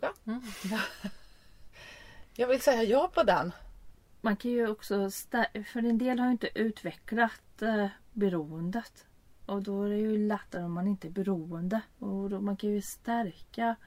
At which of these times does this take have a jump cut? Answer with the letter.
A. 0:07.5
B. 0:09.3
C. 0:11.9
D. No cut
C